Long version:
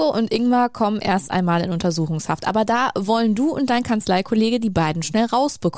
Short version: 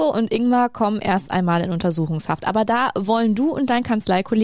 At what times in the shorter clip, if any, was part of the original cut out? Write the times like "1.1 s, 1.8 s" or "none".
none